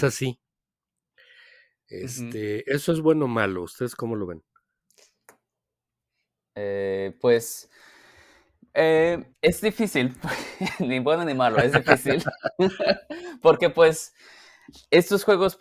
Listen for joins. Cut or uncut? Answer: cut